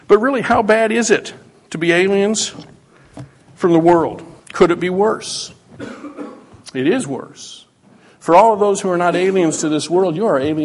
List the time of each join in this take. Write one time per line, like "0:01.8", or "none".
0:04.4